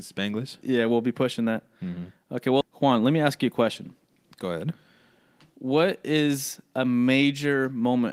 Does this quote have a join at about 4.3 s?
no; 1 cut; at 2.6 s

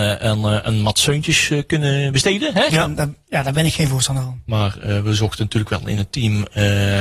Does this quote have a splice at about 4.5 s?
yes; 2 cuts; at 2.7 s, 4.5 s

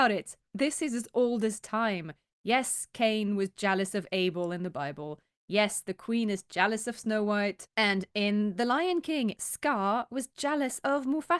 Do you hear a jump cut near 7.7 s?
yes; 2 cuts; at 7.7 s, 9.4 s

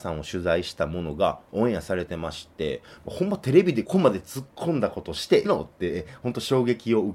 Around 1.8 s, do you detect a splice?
no; 2 cuts; at 3.8 s, 5.4 s

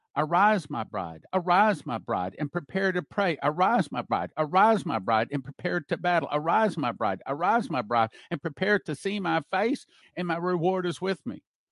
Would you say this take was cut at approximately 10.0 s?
yes; 1 cut; at 10.0 s

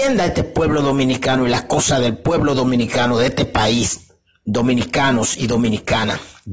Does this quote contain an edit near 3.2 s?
no; 0 cuts

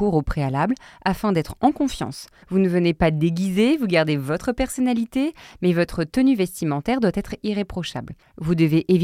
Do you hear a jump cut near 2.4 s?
yes; 1 cut; at 2.4 s

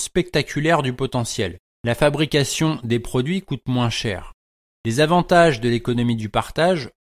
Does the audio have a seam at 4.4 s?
no; 1 cut; at 1.7 s

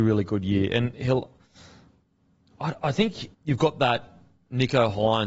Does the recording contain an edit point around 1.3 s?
no; 1 cut; at 3.3 s

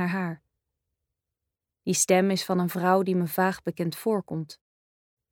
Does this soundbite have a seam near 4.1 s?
no; 1 cut; at 1.7 s

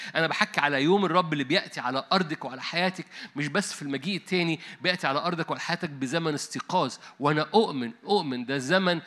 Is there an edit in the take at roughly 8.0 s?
yes; 1 cut; at 8.0 s

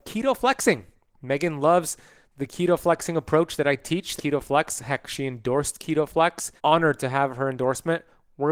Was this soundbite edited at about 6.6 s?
yes; 2 cuts; at 4.2 s, 6.6 s

